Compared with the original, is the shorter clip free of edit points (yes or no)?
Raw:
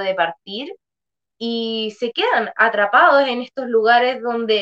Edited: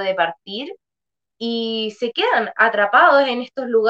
yes